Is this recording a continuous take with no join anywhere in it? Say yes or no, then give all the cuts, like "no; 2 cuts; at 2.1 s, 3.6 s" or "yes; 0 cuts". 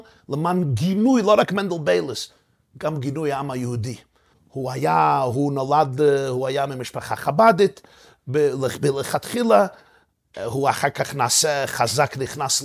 no; 1 cut; at 4.3 s